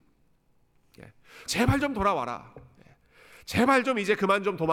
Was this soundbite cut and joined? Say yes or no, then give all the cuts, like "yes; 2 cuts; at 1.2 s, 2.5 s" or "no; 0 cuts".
yes; 1 cut; at 1.5 s